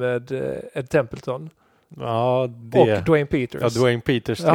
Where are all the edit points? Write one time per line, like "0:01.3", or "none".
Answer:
none